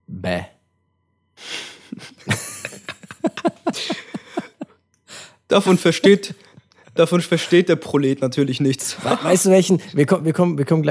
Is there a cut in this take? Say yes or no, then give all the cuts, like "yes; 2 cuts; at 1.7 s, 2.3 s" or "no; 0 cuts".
no; 0 cuts